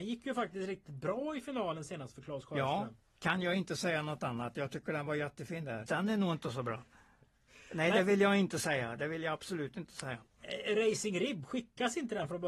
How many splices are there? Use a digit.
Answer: 1